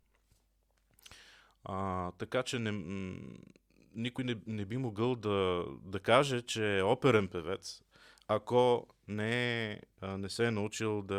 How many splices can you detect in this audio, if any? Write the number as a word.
zero